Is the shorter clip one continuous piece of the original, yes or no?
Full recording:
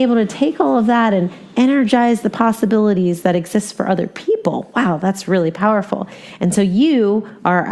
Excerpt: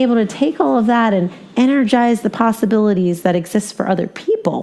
yes